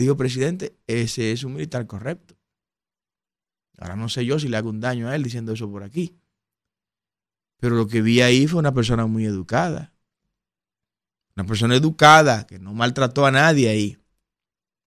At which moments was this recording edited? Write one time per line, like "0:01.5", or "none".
0:11.3